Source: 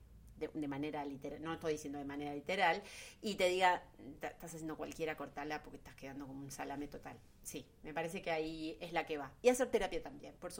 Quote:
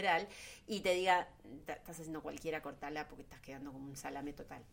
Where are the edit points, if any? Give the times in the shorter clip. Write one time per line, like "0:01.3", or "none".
none